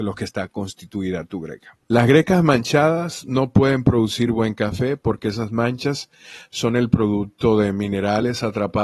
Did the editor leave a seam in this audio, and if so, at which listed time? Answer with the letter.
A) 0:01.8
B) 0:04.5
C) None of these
A